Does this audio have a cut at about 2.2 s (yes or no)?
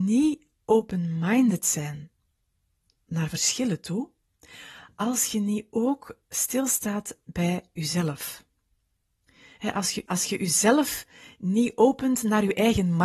no